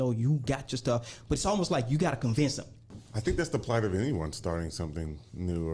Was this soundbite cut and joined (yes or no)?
no